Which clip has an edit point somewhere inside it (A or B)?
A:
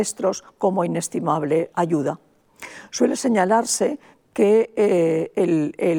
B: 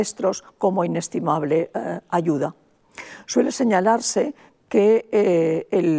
A